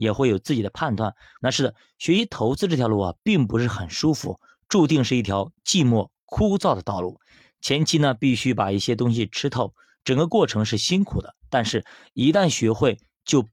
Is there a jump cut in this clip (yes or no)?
yes